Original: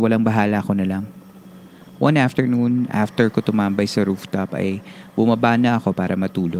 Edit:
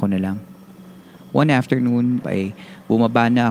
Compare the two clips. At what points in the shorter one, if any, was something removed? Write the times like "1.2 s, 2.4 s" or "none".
2.2 s

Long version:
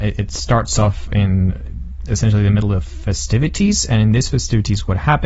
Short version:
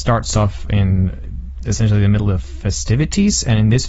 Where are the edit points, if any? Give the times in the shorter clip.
none

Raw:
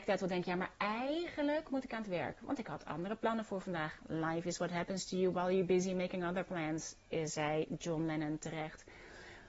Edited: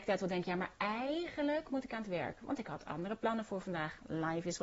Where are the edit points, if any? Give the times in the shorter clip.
none

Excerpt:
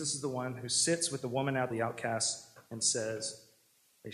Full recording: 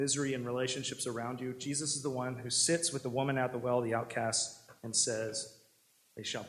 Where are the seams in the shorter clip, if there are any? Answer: 1.7 s

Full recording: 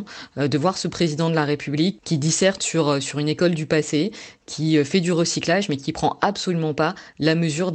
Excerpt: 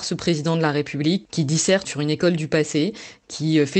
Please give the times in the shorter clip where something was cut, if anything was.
1.8 s

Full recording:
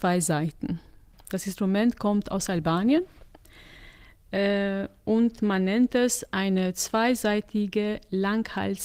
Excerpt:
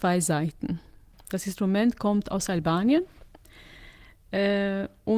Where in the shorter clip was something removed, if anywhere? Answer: none

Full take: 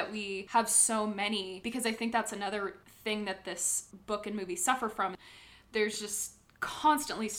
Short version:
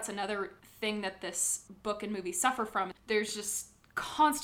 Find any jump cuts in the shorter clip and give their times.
3.0 s

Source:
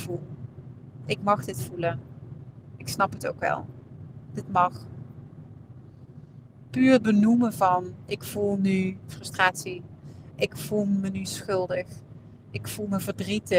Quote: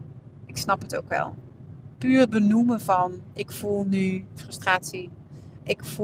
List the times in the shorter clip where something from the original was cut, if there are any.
1.9 s

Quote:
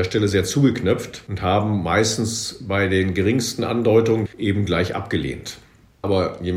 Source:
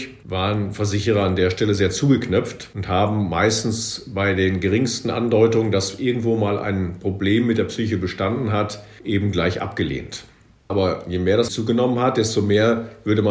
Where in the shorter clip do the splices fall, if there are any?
4.2 s

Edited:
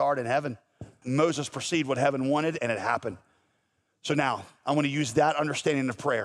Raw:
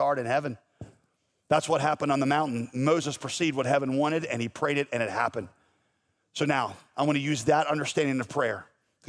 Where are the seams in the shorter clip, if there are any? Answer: 1.0 s, 2.6 s

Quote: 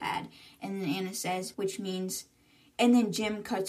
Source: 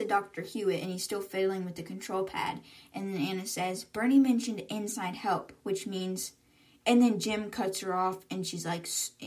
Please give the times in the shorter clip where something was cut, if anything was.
1.5 s

